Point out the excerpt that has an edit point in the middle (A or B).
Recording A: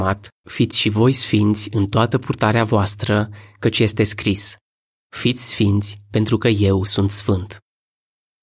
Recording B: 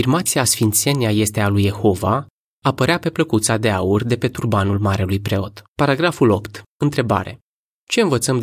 B